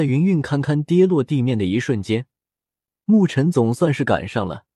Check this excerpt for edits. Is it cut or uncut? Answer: uncut